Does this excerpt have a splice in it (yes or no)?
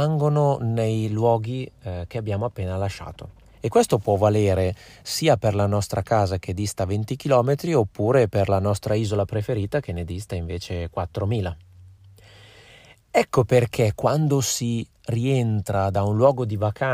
no